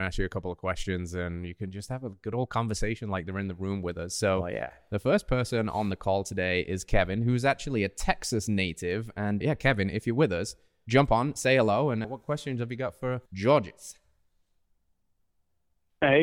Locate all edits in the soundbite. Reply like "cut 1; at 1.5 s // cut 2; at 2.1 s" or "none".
cut 1; at 9.4 s // cut 2; at 12.0 s // cut 3; at 13.3 s